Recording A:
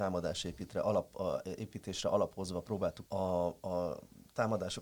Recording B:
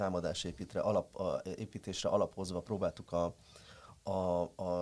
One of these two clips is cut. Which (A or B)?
A